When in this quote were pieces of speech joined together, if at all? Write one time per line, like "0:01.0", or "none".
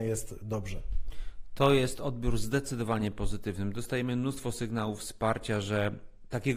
none